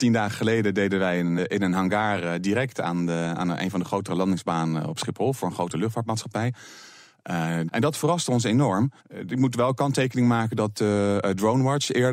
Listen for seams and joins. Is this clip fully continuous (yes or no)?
no